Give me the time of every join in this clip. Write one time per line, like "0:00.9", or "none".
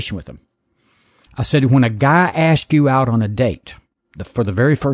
0:01.3